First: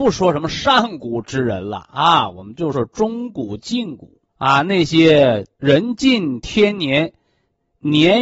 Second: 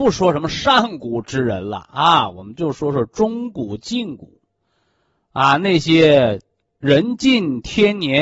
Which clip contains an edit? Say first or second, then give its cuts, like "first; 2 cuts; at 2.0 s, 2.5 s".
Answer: first; 3 cuts; at 2.7 s, 4.3 s, 5.5 s